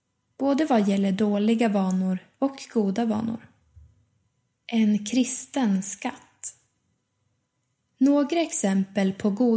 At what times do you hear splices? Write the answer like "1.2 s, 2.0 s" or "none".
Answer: none